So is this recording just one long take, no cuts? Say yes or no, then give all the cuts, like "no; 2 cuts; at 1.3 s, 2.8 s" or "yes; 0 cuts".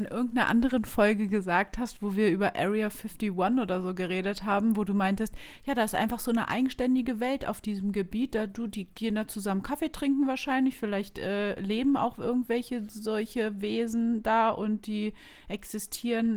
yes; 0 cuts